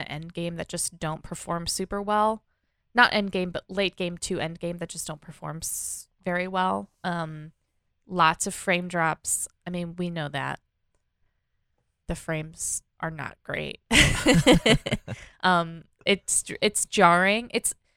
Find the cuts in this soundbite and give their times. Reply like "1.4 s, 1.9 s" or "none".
none